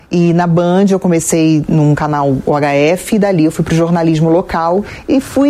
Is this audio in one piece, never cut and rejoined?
yes; 0 cuts

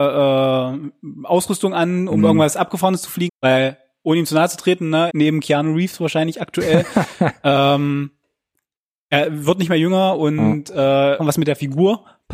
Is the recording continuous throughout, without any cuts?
no; 3 cuts; at 3.3 s, 5.1 s, 11.2 s

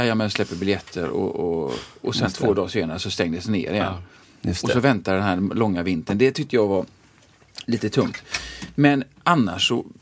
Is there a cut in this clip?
no; 0 cuts

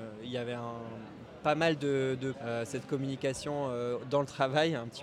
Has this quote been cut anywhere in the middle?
yes; 1 cut; at 2.3 s

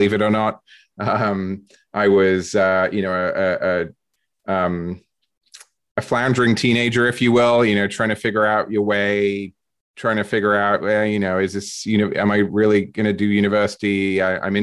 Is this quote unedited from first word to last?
yes; 0 cuts

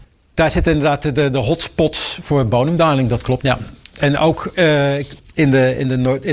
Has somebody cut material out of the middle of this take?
yes; 1 cut; at 3.4 s

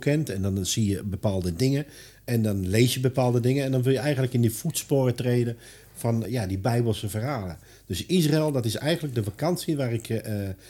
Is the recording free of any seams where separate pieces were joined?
no; 1 cut; at 6.3 s

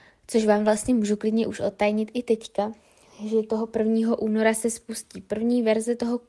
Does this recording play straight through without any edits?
yes; 0 cuts

